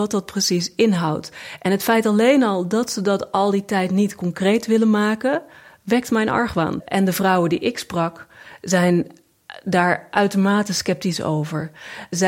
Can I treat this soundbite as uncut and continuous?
yes; 0 cuts

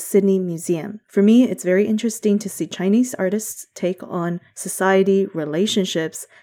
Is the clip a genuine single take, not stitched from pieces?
no; 1 cut; at 1.1 s

